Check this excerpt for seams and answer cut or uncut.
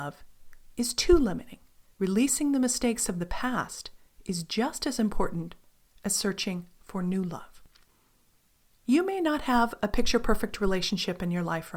cut